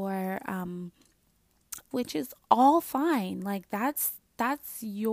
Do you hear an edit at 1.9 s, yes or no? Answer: yes